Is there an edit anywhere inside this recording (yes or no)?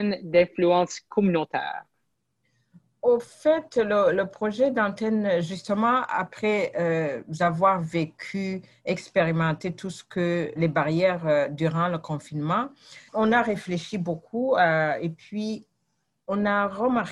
yes